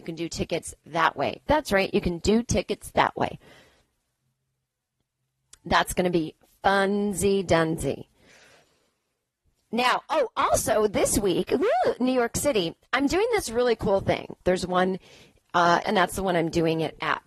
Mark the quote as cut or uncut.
cut